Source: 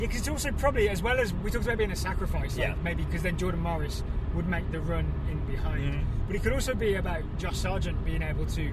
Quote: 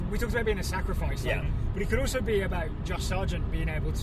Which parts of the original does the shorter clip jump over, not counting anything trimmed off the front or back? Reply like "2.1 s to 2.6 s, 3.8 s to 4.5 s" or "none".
2.7 s to 5.9 s